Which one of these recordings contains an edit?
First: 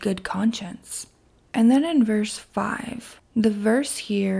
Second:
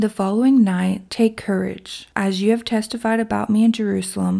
second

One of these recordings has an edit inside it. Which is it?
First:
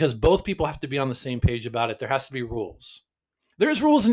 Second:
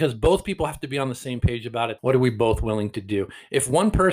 second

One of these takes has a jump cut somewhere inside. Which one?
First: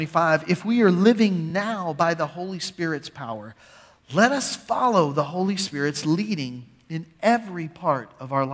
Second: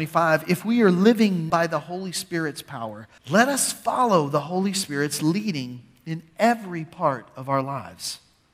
second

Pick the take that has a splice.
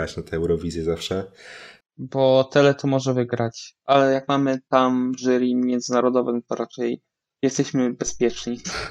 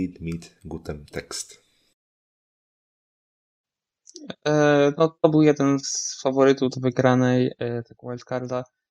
first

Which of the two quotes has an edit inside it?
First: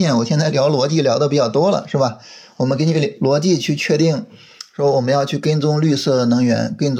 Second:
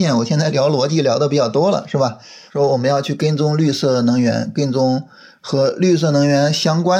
second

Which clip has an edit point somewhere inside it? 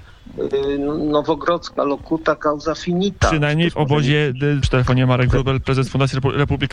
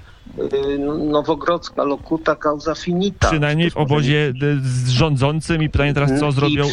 first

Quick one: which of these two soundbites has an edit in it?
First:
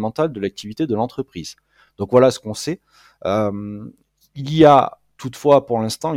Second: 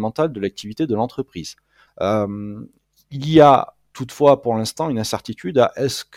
second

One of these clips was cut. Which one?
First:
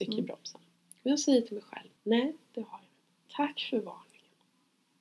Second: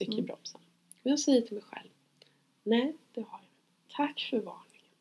first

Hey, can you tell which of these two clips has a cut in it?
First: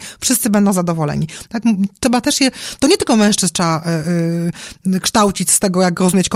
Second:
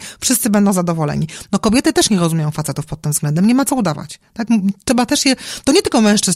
first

